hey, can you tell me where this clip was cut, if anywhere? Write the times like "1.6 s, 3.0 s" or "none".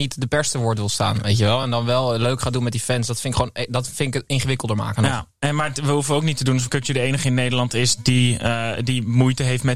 none